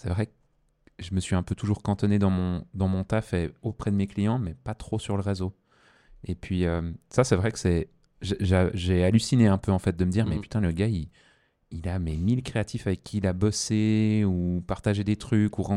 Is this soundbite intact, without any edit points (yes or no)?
yes